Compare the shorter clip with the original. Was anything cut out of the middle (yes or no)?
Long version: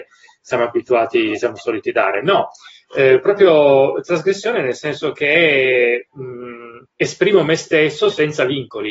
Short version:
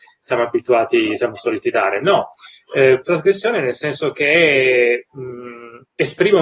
yes